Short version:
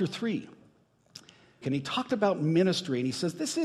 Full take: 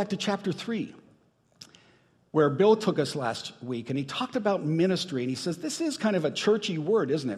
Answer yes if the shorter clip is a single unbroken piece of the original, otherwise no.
no